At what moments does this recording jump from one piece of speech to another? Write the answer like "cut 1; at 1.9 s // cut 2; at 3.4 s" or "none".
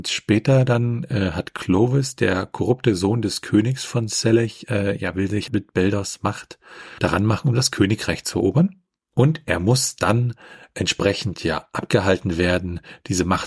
cut 1; at 5.5 s